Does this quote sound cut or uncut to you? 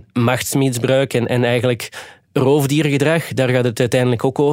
uncut